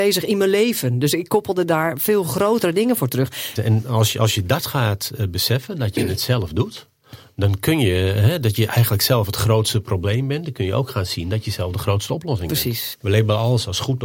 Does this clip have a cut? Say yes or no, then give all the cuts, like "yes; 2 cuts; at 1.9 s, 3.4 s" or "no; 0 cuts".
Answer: yes; 2 cuts; at 3.6 s, 12.9 s